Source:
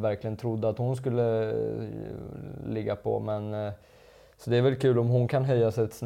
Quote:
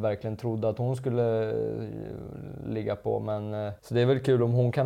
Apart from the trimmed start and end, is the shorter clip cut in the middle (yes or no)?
yes